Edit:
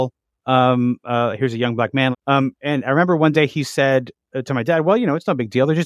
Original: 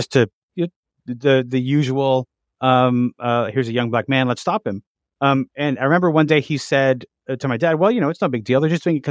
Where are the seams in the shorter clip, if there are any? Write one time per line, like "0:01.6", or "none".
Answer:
0:02.1